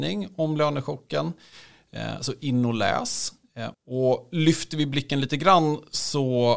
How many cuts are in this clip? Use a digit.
1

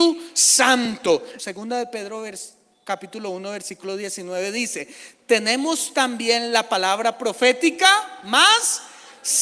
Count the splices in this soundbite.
1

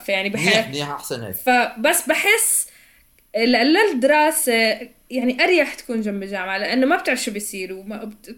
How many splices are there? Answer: 0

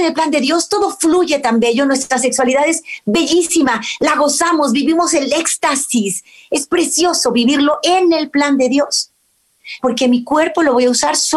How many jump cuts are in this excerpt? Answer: 1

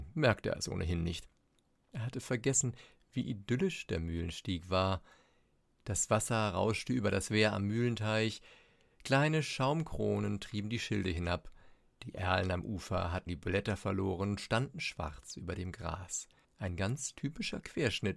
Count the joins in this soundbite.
2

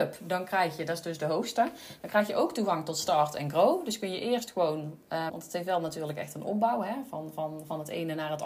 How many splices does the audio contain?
1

